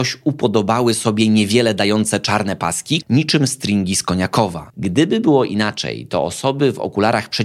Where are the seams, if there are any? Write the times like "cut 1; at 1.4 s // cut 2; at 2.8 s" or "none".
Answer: cut 1; at 3.0 s // cut 2; at 4.7 s